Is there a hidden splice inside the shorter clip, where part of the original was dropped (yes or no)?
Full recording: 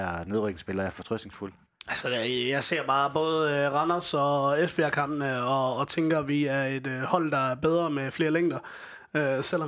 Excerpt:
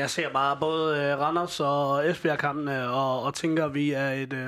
no